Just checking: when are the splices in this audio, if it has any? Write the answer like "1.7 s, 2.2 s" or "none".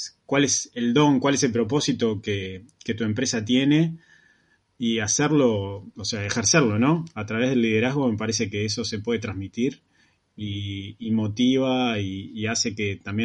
none